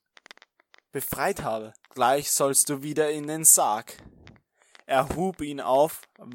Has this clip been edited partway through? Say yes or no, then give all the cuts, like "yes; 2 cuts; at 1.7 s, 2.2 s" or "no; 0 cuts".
yes; 1 cut; at 1.8 s